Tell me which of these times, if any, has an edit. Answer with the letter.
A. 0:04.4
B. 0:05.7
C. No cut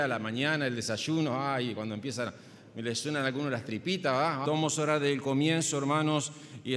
A